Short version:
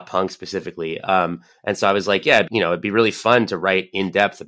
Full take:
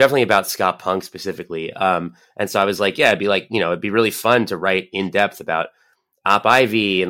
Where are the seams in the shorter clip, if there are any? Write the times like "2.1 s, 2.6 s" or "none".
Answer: 2.5 s